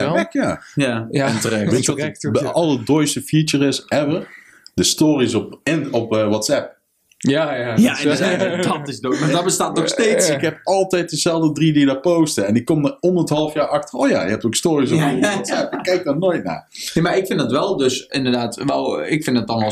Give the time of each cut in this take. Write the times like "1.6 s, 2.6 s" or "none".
none